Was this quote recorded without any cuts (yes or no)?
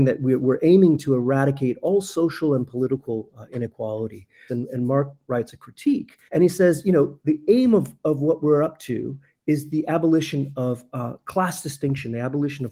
no